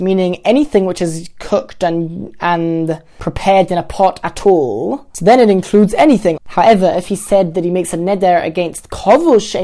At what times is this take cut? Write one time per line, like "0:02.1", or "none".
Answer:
0:06.4